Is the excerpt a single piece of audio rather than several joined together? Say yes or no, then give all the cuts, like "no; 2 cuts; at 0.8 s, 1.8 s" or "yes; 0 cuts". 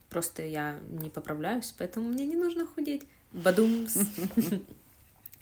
yes; 0 cuts